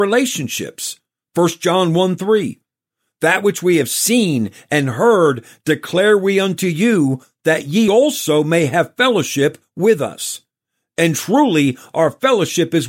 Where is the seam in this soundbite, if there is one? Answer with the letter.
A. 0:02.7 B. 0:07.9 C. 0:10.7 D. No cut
D